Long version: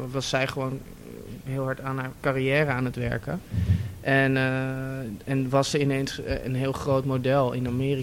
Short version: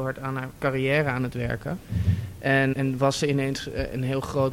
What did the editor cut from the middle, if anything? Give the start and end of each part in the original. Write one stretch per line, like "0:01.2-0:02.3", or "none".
0:04.3-0:05.2

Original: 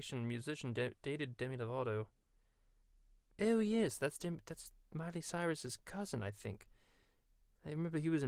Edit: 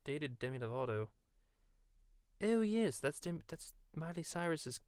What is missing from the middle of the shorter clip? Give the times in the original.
none

